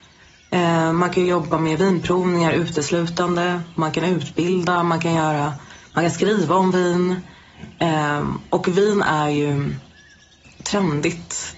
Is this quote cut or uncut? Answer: uncut